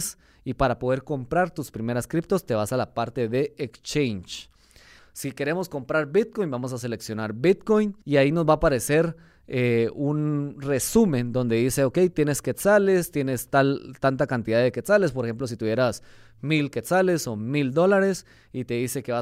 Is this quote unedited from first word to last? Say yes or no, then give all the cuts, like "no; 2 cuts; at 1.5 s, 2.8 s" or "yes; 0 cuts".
no; 2 cuts; at 5.0 s, 8.0 s